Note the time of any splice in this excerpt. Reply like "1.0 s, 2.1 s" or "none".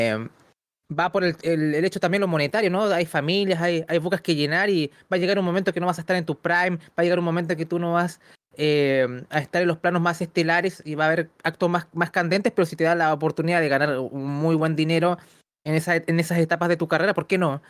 none